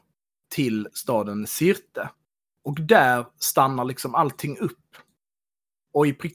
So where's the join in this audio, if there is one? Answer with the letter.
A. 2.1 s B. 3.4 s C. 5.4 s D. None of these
D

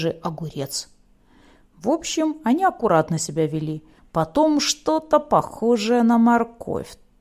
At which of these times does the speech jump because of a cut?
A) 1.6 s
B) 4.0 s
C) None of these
B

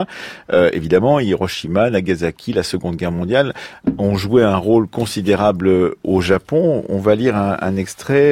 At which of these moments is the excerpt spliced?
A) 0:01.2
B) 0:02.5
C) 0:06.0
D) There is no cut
C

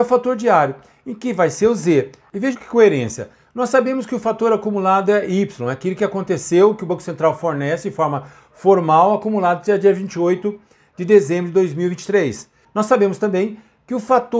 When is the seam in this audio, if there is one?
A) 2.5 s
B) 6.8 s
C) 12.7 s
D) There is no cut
A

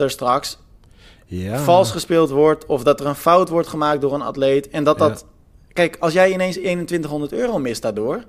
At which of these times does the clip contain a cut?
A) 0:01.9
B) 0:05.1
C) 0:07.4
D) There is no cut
D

